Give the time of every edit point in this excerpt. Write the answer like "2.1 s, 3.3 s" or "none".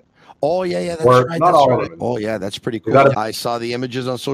1.9 s, 3.1 s